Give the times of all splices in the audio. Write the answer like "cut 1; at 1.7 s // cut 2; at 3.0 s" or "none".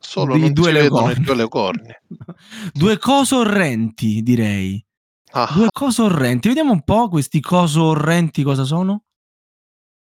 cut 1; at 5.7 s

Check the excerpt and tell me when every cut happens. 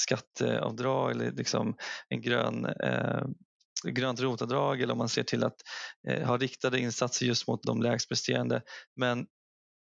cut 1; at 3.8 s // cut 2; at 7.6 s // cut 3; at 8.8 s

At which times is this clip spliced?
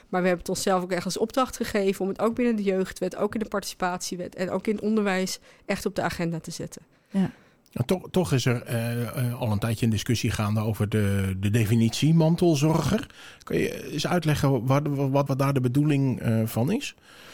cut 1; at 15.3 s

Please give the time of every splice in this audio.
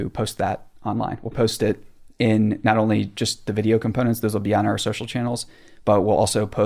cut 1; at 1.3 s

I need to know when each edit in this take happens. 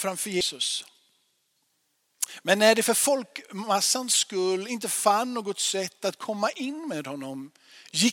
none

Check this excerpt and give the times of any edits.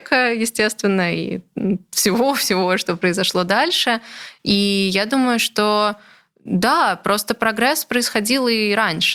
none

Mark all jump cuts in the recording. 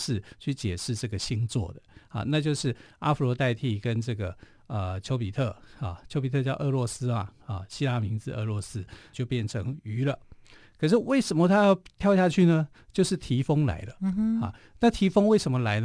cut 1; at 9.1 s

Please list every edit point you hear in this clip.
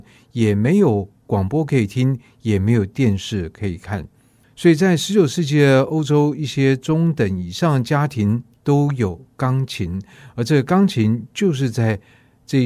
cut 1; at 4.4 s

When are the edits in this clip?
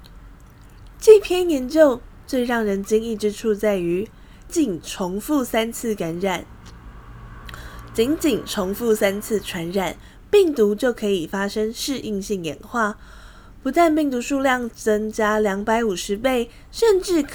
cut 1; at 4.5 s

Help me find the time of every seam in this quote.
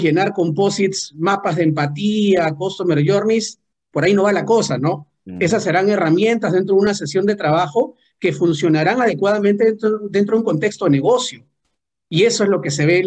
none

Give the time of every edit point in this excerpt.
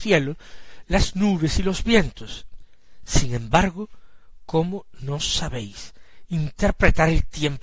none

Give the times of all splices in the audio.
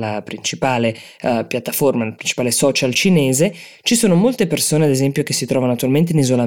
none

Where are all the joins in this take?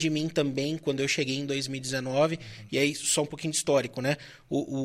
none

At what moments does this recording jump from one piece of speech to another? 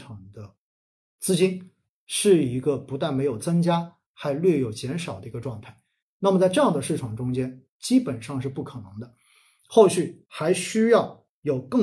cut 1; at 7.7 s

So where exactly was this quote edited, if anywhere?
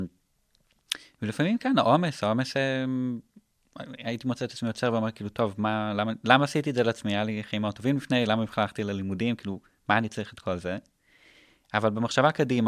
none

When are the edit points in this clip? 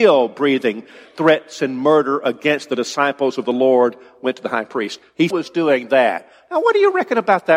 cut 1; at 5.3 s

